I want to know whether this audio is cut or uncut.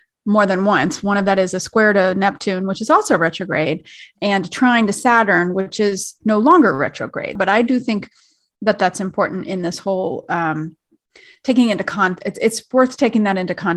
uncut